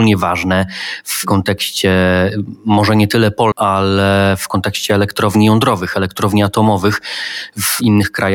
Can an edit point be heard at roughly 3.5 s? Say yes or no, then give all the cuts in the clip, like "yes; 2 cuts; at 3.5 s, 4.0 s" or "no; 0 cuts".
yes; 1 cut; at 3.5 s